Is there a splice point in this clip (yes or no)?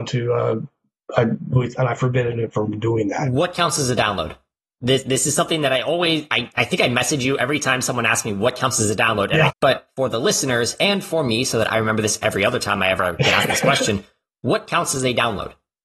yes